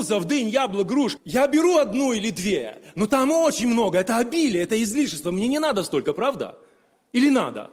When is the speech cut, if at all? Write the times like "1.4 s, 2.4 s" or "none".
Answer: none